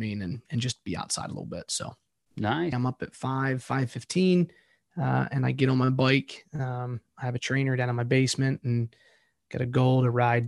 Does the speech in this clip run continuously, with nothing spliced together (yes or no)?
no